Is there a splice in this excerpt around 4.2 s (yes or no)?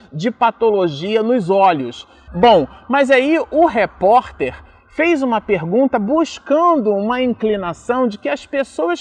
no